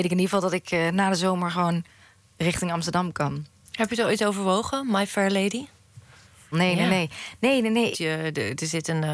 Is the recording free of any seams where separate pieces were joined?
no; 2 cuts; at 6.5 s, 7.9 s

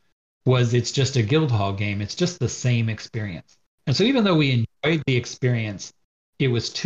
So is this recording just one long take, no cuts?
yes; 0 cuts

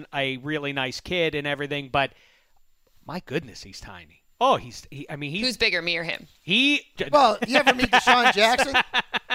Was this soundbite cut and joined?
yes; 1 cut; at 7.0 s

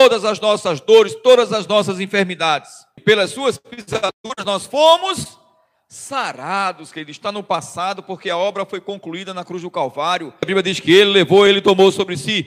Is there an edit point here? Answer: yes; 3 cuts; at 3.0 s, 10.4 s, 11.5 s

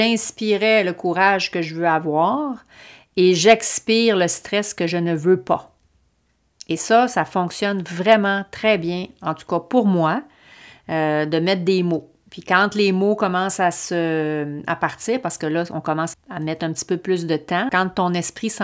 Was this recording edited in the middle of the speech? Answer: yes; 2 cuts; at 16.1 s, 17.7 s

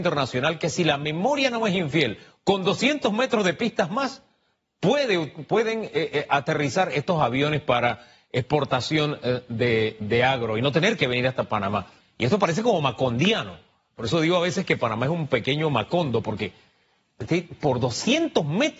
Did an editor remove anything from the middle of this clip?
yes; 2 cuts; at 12.0 s, 16.2 s

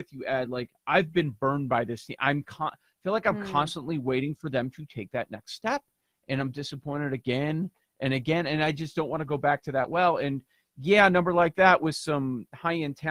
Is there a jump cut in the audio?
no; 0 cuts

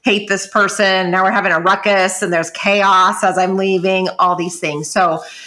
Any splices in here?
no; 0 cuts

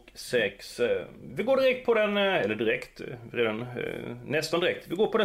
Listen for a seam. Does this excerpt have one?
no; 0 cuts

